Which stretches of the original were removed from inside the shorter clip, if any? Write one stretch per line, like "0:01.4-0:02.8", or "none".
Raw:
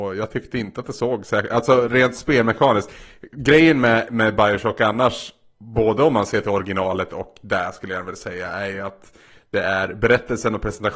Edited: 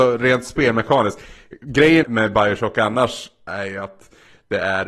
0:03.7-0:04.1
0:05.5-0:08.5